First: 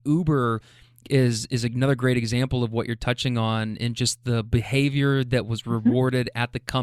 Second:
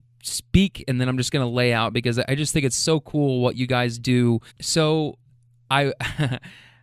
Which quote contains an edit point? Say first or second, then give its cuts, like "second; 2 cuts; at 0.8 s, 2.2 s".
second; 1 cut; at 4.5 s